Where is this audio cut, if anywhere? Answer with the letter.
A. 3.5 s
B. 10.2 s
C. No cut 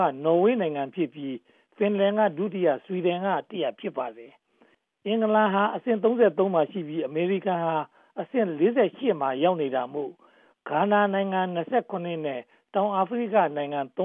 A